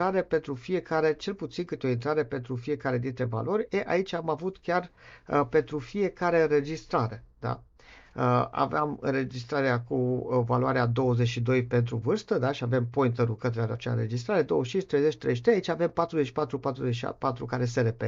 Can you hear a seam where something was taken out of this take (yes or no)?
no